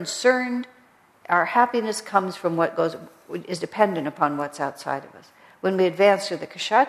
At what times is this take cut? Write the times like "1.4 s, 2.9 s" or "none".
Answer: none

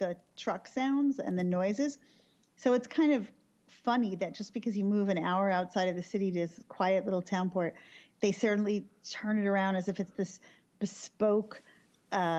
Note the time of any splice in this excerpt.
none

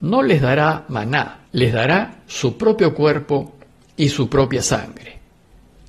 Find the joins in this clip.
1.5 s

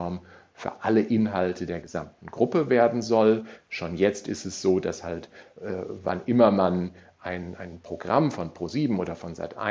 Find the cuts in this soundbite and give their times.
none

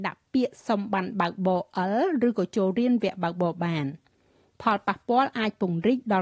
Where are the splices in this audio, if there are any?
none

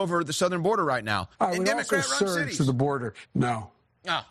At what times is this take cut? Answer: 1.3 s, 3.3 s

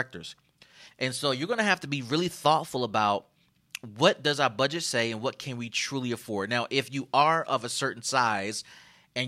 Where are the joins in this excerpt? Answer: 0.9 s

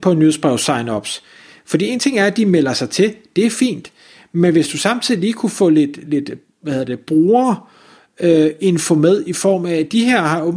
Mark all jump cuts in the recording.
none

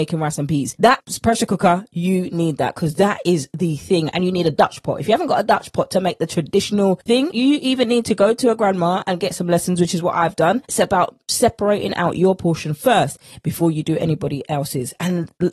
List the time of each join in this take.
none

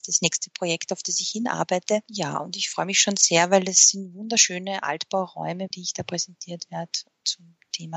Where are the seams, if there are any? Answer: 5.7 s

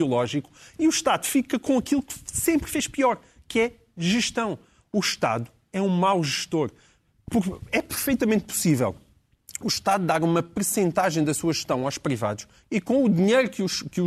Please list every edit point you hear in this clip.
none

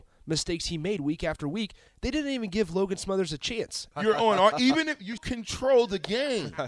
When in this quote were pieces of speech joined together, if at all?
3.9 s, 5.2 s

